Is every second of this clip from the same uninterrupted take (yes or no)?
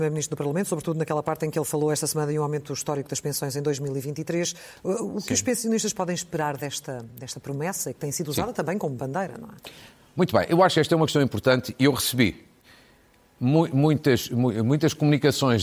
yes